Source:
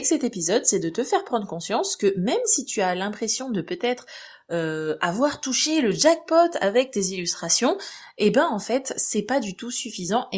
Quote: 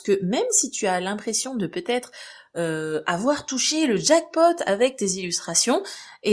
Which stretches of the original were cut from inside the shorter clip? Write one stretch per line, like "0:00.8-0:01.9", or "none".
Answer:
none